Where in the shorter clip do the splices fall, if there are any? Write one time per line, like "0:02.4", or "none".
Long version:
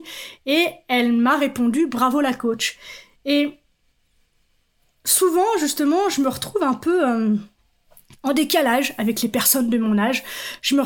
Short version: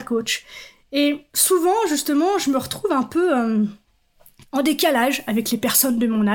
0:01.3